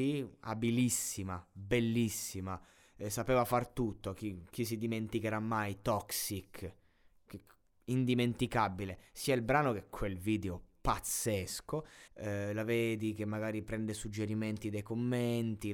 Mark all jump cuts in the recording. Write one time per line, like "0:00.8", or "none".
0:12.1